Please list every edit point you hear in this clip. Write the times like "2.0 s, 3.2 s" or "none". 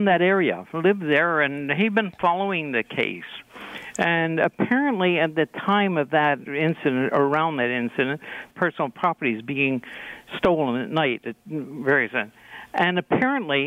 8.5 s